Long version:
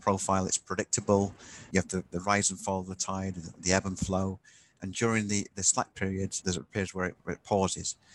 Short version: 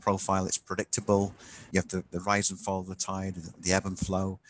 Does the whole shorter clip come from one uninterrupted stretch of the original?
yes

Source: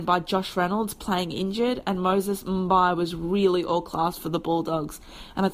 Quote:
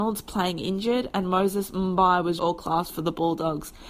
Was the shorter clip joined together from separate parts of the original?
yes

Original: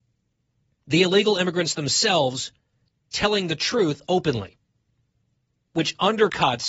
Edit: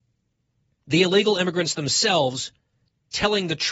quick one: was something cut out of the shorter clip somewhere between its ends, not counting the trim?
no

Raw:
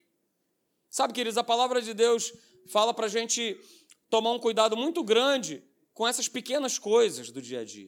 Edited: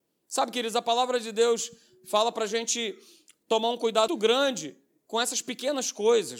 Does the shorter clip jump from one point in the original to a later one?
yes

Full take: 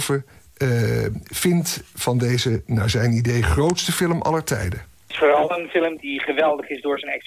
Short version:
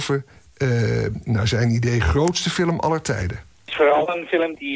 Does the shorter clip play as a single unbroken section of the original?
no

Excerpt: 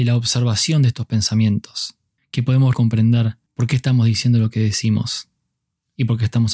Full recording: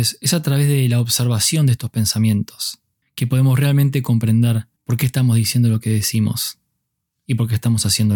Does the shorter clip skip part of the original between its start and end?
yes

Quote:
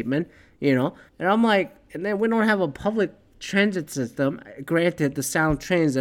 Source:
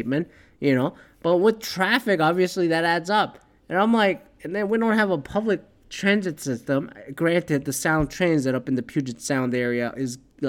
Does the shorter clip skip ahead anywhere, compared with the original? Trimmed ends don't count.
yes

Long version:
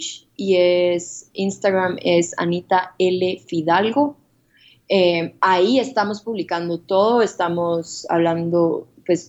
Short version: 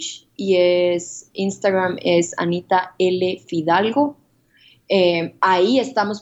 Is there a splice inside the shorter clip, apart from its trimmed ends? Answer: no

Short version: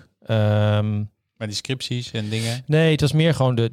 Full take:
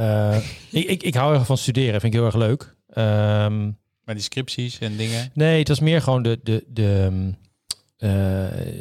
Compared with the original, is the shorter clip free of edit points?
yes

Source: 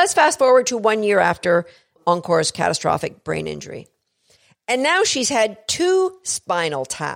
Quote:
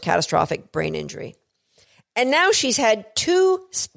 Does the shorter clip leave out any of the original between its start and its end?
no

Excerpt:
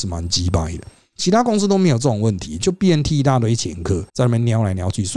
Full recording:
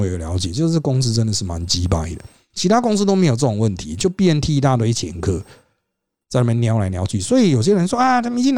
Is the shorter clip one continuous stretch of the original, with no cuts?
no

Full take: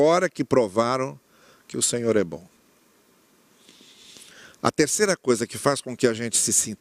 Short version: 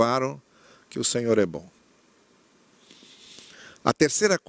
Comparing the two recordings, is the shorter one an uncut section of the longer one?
yes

